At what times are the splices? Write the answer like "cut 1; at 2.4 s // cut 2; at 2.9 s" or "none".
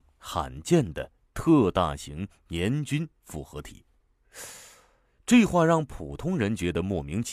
none